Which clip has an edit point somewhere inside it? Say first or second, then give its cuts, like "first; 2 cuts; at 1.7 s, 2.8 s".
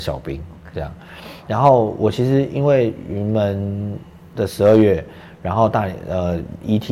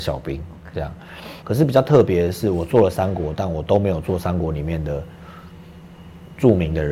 second; 1 cut; at 1.4 s